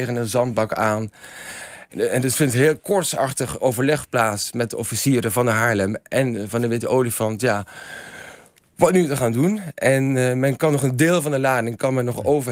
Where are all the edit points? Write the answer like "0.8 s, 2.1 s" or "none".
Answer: 1.9 s